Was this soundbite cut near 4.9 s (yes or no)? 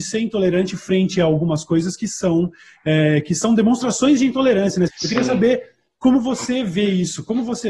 yes